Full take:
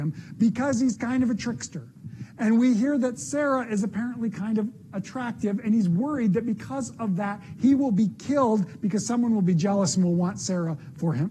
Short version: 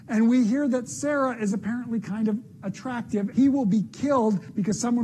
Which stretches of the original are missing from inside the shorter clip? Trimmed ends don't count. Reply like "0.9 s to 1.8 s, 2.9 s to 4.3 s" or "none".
5.6 s to 7.6 s

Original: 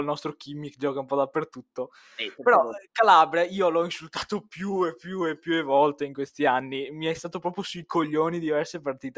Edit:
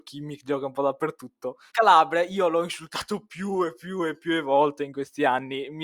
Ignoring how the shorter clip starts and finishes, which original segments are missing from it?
2.0 s to 2.9 s

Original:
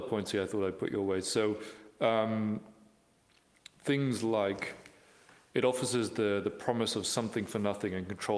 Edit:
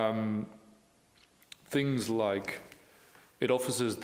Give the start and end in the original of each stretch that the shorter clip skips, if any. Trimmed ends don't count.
none

